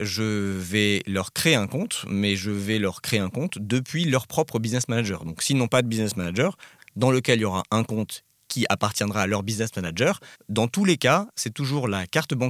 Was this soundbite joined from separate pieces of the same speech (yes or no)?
yes